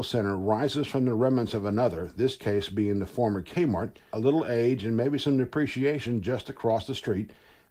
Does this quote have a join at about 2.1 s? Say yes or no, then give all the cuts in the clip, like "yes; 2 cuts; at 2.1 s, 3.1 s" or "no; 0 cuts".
no; 1 cut; at 4.1 s